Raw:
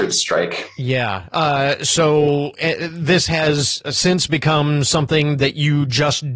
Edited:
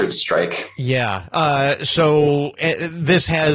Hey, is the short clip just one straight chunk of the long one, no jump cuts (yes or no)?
yes